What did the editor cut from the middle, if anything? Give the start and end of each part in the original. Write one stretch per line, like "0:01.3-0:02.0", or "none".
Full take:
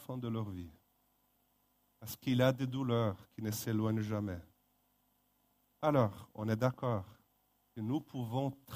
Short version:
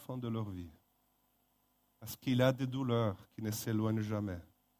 none